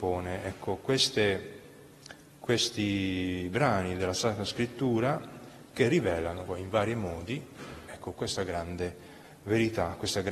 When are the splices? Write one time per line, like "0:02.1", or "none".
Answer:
0:06.5
0:07.9